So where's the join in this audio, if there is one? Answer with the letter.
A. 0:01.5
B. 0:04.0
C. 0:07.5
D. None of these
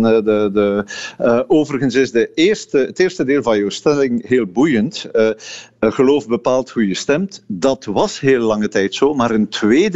D